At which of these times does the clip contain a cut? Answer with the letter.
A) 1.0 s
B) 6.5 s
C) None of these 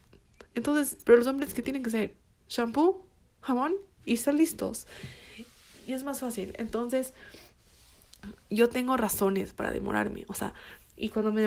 A